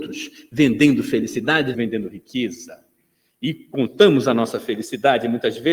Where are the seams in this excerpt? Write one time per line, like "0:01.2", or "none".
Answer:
0:01.7